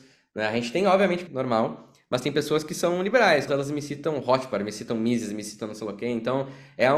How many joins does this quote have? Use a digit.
2